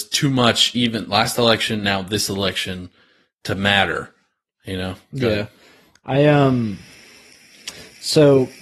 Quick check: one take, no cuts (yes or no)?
yes